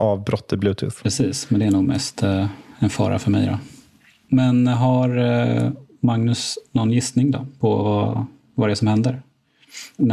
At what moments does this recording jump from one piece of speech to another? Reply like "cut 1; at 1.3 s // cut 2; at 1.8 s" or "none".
none